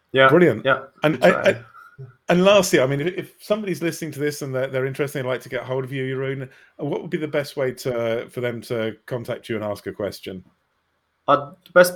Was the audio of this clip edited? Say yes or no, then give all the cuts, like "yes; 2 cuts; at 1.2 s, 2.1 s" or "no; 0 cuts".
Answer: no; 0 cuts